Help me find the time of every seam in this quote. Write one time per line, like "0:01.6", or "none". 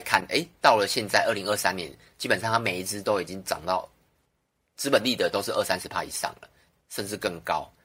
none